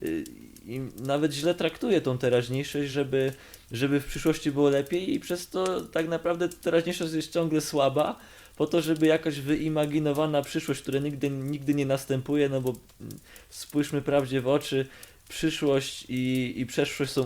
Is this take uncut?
yes; 0 cuts

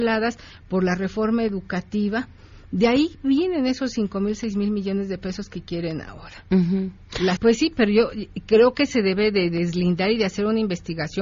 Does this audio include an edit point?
yes; 1 cut; at 7.4 s

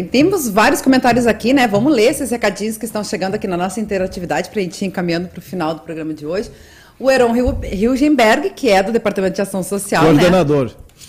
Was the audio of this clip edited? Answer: no; 0 cuts

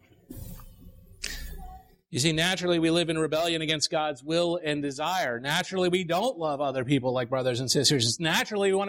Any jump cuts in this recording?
no; 0 cuts

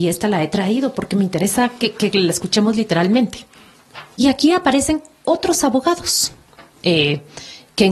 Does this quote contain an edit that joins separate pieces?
yes; 1 cut; at 4.1 s

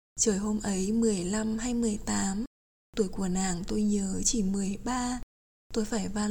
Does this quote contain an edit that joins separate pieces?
no; 0 cuts

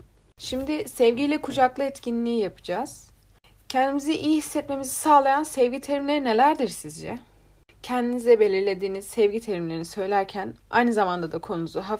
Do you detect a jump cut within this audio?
no; 0 cuts

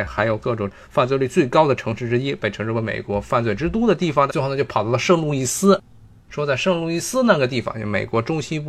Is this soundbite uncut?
no; 1 cut; at 4.3 s

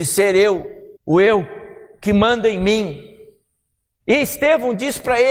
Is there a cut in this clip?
yes; 2 cuts; at 1.0 s, 4.0 s

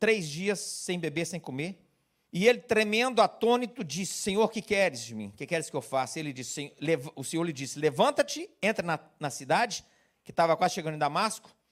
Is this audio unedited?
no; 1 cut; at 2.2 s

